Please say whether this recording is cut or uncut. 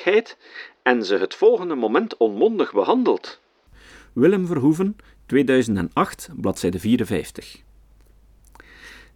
uncut